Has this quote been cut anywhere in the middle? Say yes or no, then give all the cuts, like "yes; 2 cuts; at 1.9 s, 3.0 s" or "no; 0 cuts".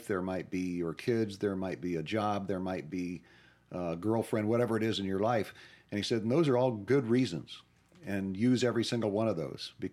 no; 0 cuts